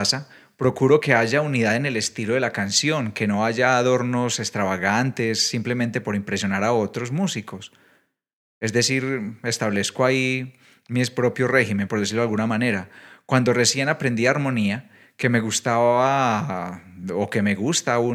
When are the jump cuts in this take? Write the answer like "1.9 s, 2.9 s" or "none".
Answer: none